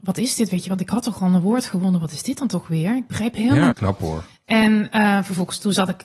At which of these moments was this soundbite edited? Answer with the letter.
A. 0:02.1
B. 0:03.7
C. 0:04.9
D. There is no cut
B